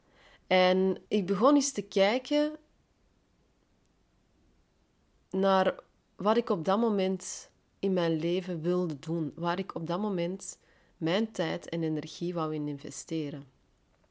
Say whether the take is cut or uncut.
cut